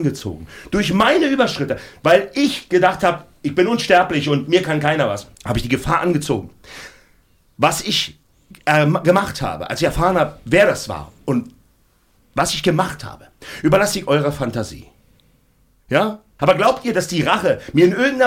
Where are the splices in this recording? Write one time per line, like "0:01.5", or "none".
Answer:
0:05.3
0:16.4